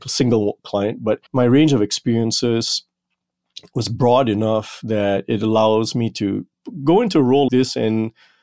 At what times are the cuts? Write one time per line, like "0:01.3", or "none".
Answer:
0:01.3
0:07.5